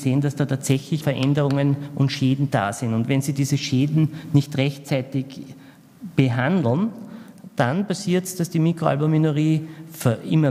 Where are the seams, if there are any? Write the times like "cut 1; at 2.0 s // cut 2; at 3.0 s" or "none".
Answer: cut 1; at 1.0 s